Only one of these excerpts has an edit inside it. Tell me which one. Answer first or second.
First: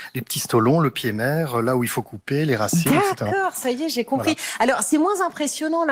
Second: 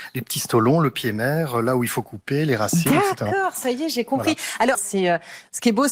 second